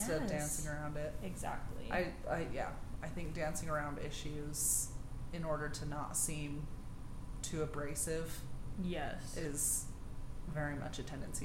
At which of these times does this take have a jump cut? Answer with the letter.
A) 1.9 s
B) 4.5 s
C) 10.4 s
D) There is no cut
D